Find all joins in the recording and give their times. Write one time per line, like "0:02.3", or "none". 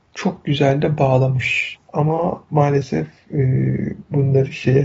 0:01.8